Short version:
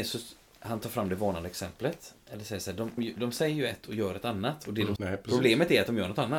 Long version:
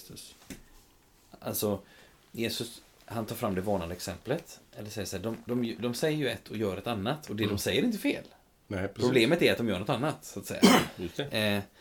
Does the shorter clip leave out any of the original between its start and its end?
yes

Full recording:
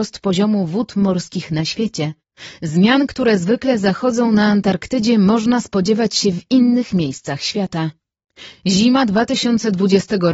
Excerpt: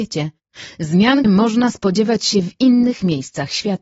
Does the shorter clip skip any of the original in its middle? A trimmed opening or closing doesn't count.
yes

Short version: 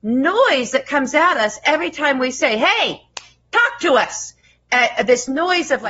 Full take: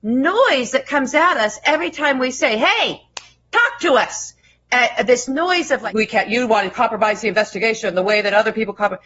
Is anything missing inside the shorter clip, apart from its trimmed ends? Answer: no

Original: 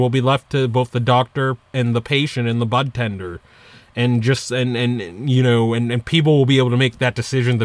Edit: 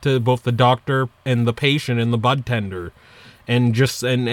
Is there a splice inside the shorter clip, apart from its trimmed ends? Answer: no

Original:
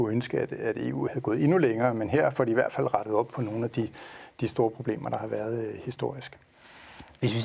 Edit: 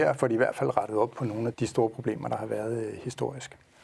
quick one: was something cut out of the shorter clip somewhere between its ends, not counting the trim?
yes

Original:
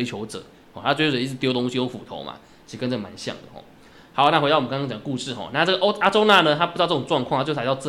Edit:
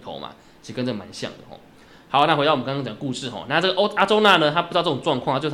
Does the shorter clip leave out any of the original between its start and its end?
no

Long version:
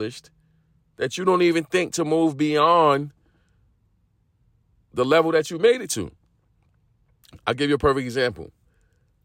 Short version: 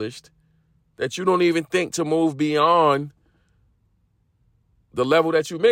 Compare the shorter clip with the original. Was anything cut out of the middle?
no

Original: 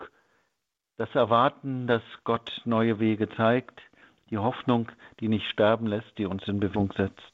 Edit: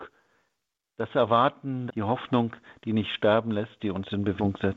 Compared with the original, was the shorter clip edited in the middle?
yes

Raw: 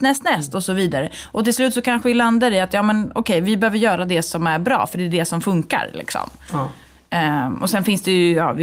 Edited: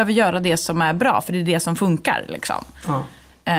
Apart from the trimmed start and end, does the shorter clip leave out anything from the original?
no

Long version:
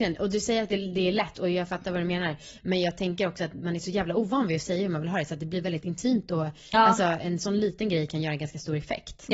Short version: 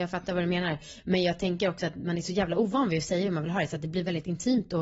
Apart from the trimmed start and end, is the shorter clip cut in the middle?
no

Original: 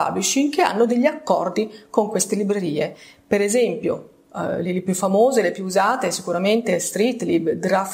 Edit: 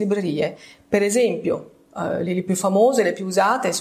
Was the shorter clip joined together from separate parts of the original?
no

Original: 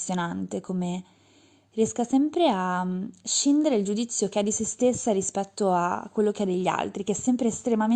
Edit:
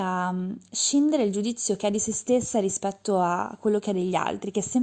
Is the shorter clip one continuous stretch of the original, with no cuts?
yes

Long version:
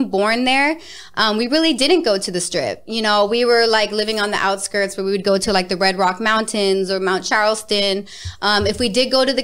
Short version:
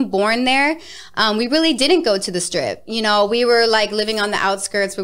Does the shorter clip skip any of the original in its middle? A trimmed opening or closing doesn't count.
no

